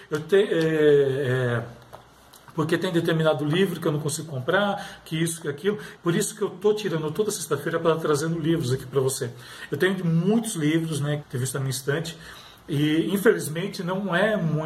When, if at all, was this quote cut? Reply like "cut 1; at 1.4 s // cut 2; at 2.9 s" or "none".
cut 1; at 6.0 s // cut 2; at 11.2 s